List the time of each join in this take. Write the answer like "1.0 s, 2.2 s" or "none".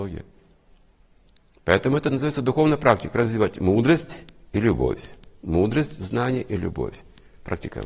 none